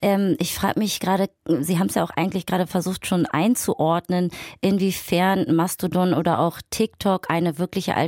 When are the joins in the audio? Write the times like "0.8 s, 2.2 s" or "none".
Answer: none